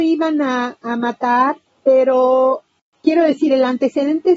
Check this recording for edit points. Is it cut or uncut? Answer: uncut